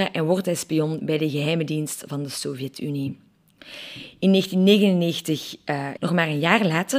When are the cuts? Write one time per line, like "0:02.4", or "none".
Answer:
0:06.0